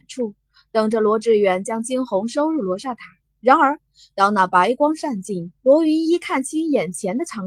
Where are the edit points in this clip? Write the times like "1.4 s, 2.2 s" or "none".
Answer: 3.2 s, 5.6 s